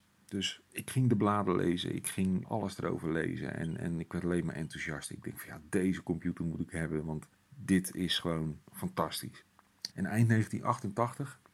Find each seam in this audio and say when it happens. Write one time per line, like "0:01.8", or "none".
0:02.4
0:08.6
0:09.9